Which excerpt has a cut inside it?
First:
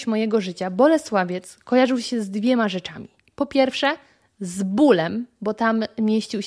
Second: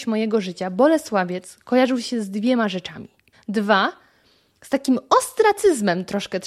second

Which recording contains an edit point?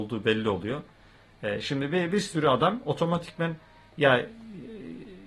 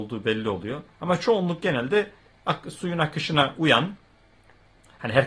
second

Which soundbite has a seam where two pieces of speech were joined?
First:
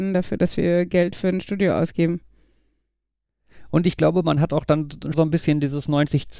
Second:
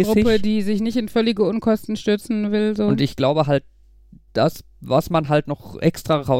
first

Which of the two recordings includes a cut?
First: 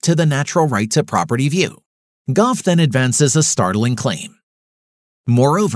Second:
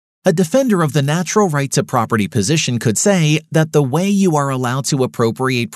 first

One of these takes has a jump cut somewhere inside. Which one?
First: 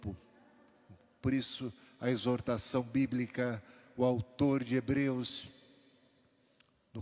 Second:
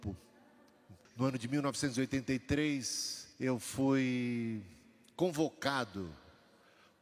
second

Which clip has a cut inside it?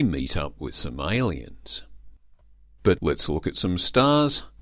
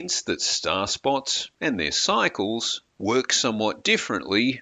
first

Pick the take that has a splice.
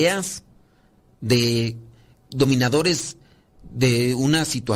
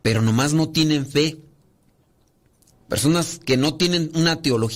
second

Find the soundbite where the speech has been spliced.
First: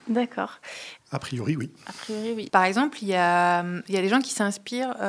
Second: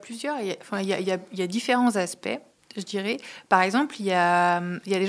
first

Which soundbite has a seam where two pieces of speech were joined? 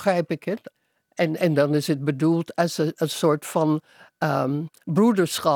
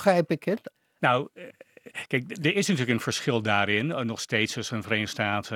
second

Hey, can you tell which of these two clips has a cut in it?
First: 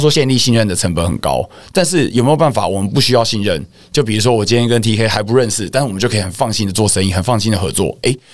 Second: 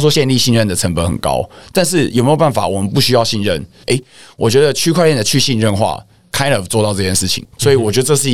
second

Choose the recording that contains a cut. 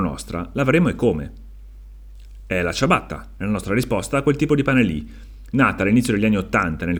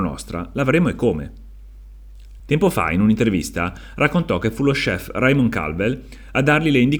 second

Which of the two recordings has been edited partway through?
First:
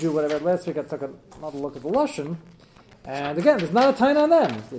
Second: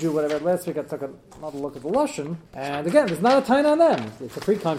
second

